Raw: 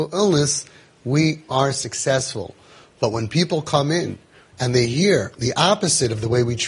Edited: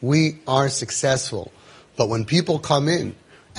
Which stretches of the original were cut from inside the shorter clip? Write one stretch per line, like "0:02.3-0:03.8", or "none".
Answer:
none